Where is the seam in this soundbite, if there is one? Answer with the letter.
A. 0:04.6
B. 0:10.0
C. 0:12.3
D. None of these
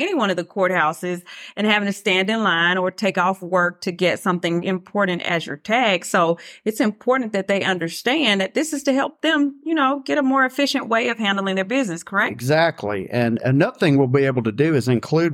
A